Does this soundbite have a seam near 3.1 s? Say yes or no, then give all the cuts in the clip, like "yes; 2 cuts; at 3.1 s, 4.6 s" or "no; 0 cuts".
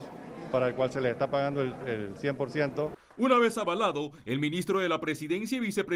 no; 1 cut; at 1.8 s